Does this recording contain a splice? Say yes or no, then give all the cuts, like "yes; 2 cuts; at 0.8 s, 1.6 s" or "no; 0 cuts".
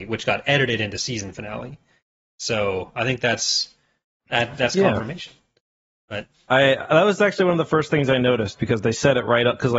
no; 0 cuts